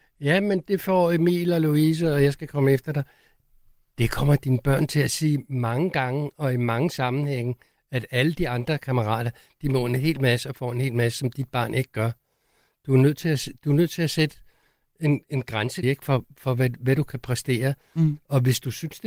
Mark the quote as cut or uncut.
cut